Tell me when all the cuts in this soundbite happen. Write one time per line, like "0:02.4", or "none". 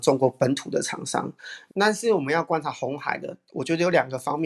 0:01.7